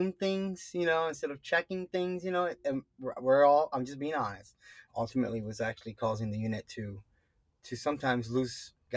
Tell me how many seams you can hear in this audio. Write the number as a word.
one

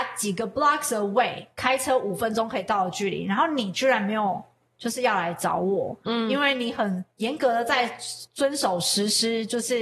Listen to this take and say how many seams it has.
zero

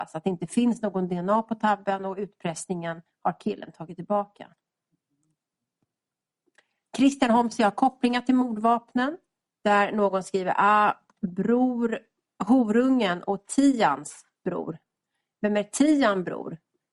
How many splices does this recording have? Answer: one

